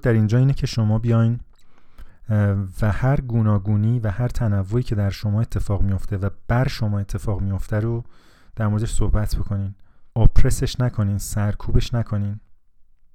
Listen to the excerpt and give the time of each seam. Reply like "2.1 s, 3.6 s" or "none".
10.1 s